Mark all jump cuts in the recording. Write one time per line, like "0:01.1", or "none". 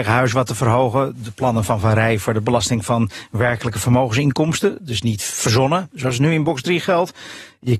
none